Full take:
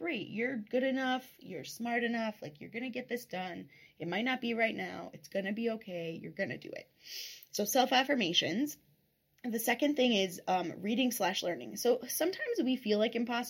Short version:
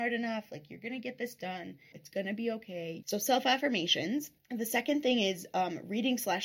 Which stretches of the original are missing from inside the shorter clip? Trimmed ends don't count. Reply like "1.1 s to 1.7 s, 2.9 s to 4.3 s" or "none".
3.8 s to 5.1 s, 6.2 s to 7.5 s, 8.8 s to 9.3 s